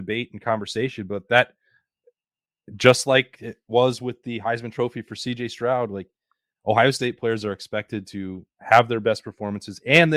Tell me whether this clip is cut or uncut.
uncut